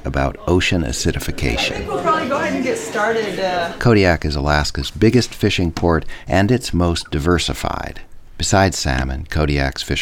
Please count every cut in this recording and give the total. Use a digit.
1